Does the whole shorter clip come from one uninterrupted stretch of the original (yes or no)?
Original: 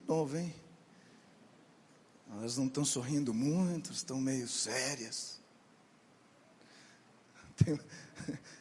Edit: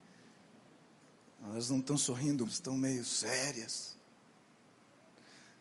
no